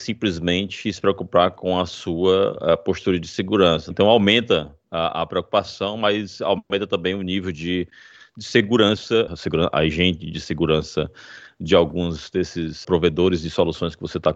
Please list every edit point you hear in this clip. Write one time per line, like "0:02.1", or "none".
0:03.9
0:09.3
0:12.8